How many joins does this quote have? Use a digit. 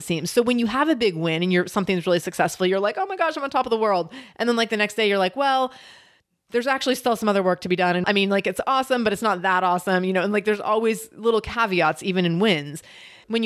0